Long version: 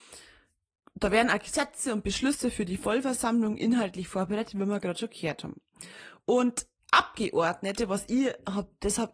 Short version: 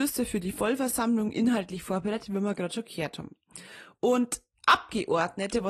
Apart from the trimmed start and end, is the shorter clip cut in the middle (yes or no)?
no